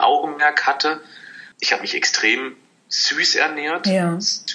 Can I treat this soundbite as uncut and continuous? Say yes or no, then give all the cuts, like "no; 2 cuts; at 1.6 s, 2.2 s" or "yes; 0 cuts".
no; 1 cut; at 1.5 s